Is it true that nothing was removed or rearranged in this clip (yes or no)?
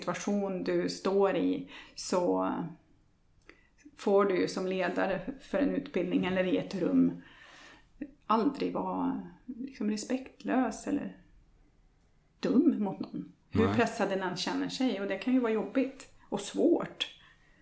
no